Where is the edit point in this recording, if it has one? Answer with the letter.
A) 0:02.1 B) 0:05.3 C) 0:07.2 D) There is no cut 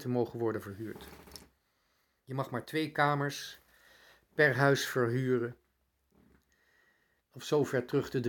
C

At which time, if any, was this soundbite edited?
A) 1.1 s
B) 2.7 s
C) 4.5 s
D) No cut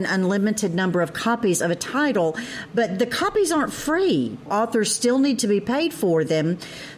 C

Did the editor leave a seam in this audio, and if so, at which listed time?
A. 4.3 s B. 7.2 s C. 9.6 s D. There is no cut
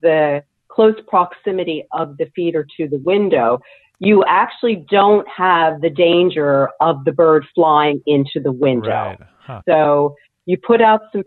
C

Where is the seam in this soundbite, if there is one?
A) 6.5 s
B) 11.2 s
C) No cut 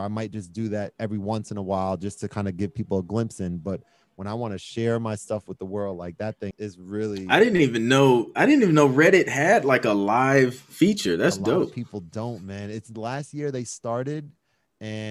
A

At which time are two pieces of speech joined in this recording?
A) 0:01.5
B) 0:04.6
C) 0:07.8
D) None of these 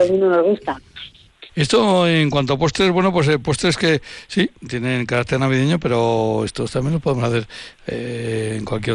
A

